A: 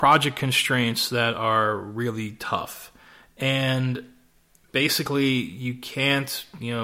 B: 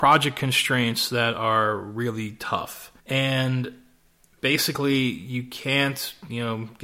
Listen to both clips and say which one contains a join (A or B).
B